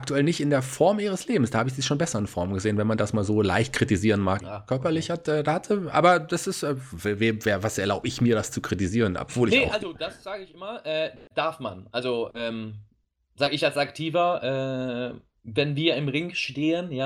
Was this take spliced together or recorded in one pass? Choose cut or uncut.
cut